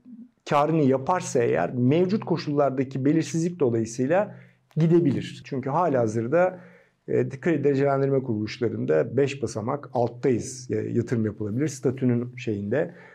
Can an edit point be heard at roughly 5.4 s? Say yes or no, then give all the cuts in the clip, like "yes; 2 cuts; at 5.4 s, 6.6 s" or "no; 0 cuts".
yes; 1 cut; at 5.4 s